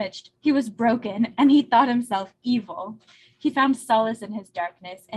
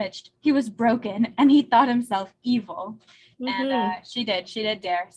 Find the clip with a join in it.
second; 1 cut; at 3.3 s

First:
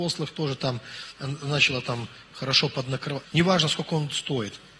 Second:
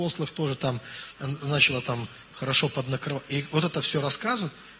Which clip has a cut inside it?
first; 1 cut; at 3.2 s

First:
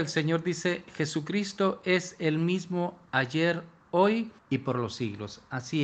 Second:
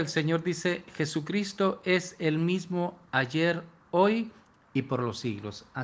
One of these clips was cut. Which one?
first; 1 cut; at 4.4 s

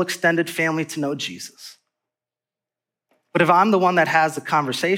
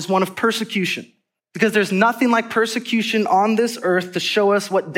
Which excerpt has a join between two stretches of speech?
second; 1 cut; at 1.4 s

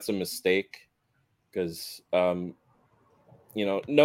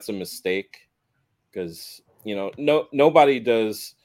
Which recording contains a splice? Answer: second; 1 cut; at 2.1 s

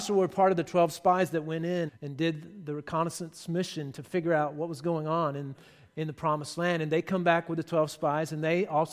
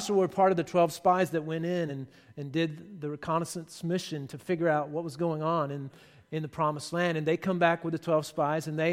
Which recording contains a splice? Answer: first; 1 cut; at 1.9 s

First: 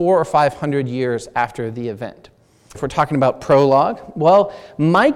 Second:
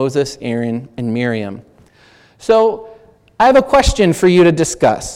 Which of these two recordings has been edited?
first; 1 cut; at 2.7 s

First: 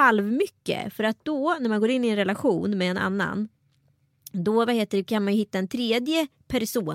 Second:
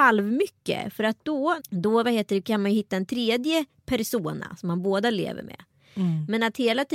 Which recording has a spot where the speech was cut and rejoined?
second; 1 cut; at 1.6 s

